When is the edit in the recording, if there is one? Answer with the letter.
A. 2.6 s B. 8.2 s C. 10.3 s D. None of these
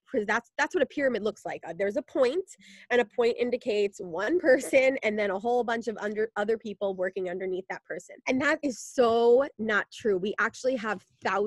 B